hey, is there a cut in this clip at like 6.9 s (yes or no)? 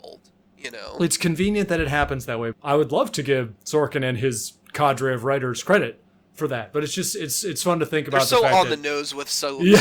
no